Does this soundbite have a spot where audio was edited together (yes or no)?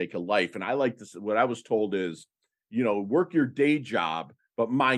no